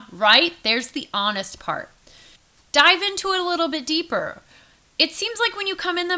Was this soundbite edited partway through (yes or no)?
no